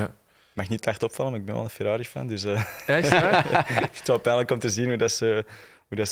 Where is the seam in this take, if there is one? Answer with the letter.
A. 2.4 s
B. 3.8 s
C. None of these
C